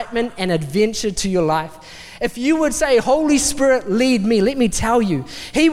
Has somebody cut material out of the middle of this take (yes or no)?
no